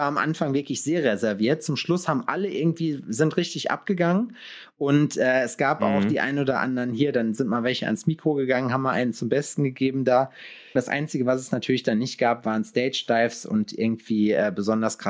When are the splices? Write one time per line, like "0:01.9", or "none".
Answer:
0:10.8